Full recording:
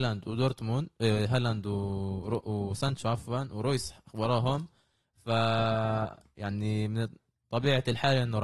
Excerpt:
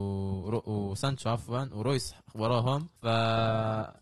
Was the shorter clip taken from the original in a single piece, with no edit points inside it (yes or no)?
no